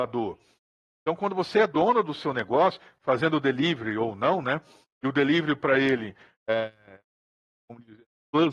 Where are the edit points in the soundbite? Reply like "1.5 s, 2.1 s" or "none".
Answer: none